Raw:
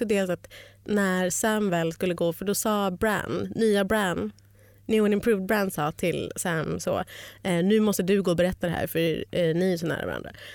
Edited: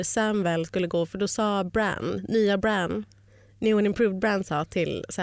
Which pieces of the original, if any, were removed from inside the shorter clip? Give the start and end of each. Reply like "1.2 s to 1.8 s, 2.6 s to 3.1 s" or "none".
none